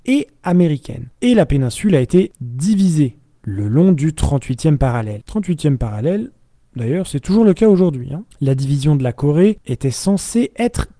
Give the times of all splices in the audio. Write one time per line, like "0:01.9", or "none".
none

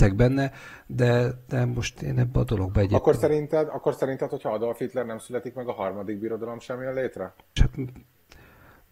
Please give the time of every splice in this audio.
0:07.6

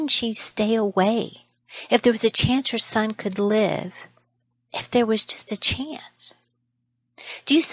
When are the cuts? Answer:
none

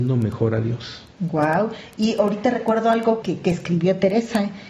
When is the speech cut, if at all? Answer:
0:01.1
0:03.2

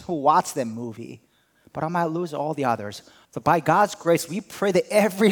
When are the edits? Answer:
0:03.2

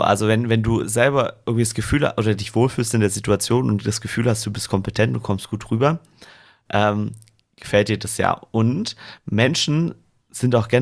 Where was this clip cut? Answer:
none

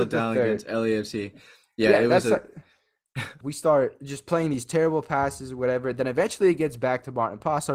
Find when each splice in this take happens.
0:03.4

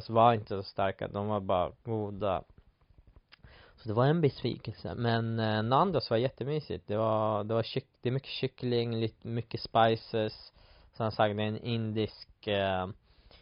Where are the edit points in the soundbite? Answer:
none

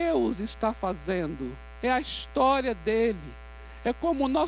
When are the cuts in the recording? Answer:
none

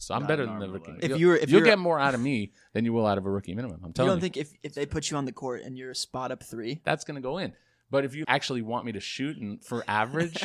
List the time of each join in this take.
0:06.8
0:08.2

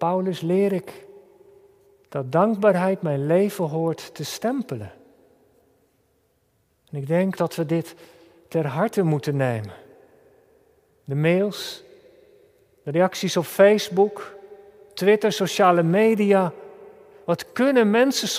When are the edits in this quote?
0:07.4

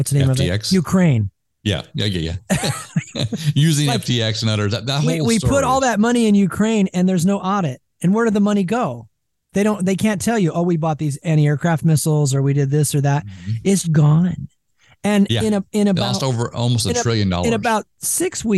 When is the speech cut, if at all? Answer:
0:13.8

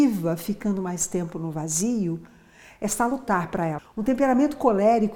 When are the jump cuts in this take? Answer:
0:03.8

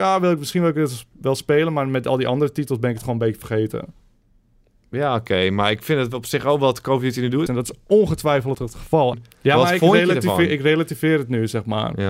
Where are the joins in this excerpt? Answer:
0:07.5
0:09.1

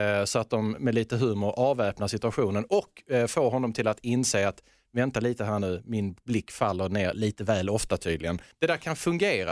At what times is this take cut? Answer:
0:08.5

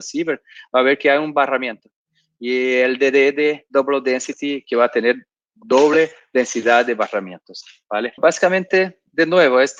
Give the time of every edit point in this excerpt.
0:08.2

